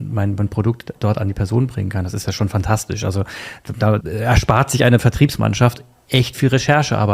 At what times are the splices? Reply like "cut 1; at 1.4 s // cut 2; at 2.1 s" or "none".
cut 1; at 4.0 s